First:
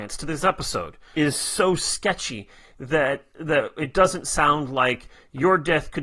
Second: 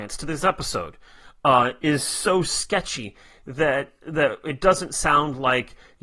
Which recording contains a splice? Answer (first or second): first